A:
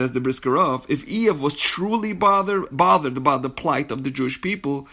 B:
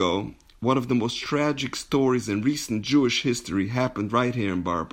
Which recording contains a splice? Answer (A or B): A